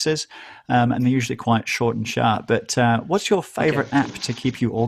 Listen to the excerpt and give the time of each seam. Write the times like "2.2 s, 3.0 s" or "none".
none